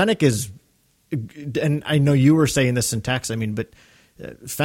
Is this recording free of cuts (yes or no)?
yes